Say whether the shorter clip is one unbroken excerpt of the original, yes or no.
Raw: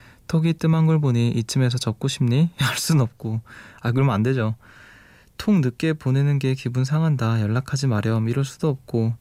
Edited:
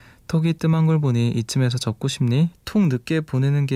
no